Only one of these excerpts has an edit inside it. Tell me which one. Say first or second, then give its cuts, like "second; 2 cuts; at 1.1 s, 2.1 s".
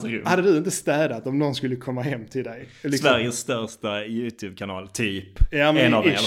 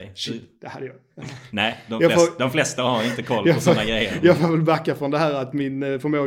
second; 1 cut; at 1.1 s